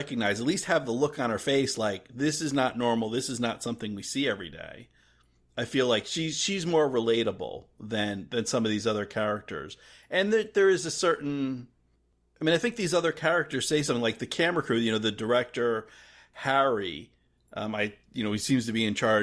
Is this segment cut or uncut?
uncut